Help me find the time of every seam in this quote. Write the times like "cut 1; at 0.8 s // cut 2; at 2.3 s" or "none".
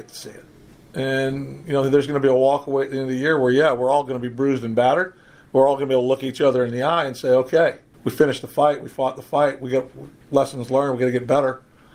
cut 1; at 7.9 s